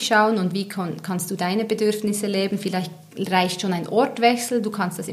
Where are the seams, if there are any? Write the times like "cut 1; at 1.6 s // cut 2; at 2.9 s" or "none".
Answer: none